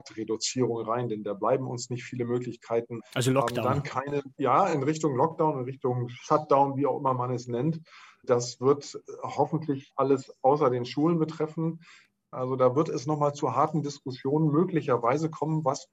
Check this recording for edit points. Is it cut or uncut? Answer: uncut